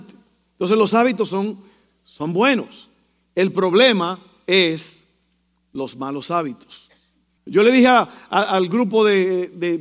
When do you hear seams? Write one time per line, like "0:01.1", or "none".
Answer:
0:07.4

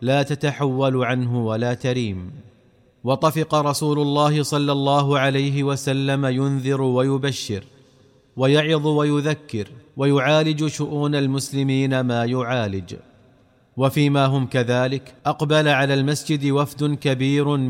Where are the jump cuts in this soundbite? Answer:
0:09.9
0:15.2

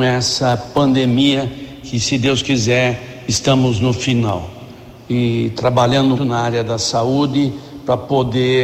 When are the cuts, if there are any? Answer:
0:06.2

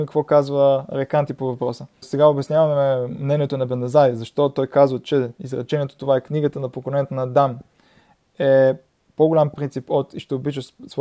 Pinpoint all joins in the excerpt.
0:02.0

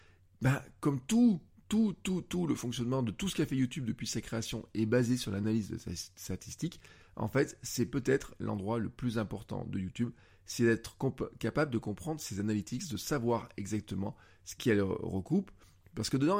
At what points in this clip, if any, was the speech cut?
none

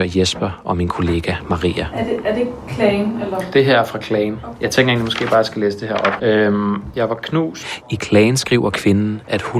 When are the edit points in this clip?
0:06.2
0:07.8

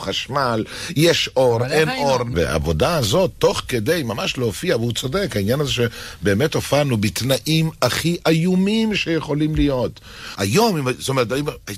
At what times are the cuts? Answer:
0:02.3
0:10.4

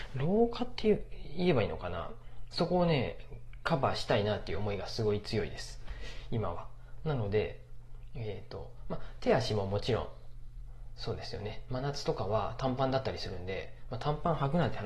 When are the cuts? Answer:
none

